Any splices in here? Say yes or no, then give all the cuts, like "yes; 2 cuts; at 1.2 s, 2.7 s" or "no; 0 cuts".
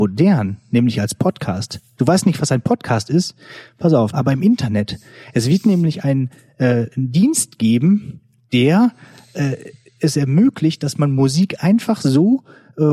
yes; 1 cut; at 4.1 s